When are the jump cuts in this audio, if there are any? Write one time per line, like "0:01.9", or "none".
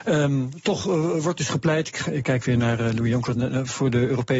0:03.4